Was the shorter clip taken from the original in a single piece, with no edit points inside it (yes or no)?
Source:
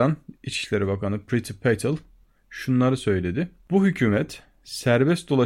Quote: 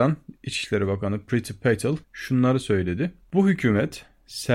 no